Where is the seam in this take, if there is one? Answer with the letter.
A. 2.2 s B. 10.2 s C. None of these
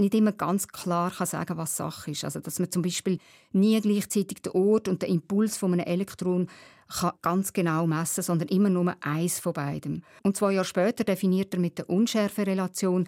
B